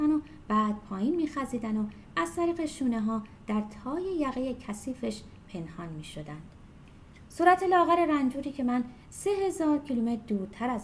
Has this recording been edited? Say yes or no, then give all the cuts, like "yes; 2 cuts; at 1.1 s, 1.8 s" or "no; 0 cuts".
no; 0 cuts